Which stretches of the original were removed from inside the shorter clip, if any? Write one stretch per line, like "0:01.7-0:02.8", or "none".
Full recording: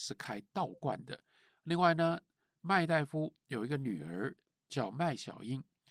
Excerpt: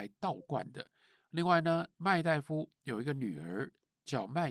0:02.3-0:02.6